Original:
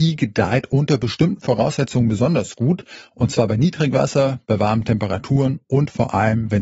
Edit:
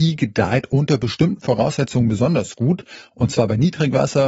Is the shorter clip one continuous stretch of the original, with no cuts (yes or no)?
yes